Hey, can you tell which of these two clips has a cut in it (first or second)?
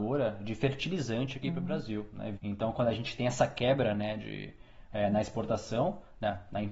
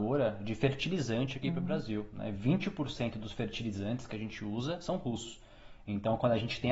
first